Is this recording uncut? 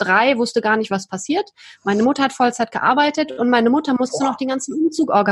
yes; 0 cuts

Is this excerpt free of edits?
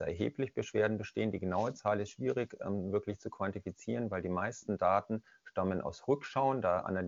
yes; 0 cuts

